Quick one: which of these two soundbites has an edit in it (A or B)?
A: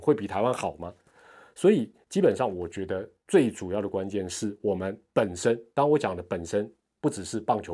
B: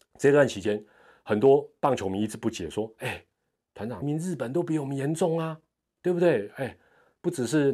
B